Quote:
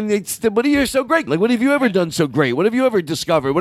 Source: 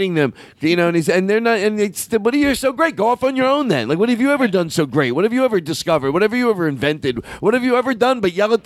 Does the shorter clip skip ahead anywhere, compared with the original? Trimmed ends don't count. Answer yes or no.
yes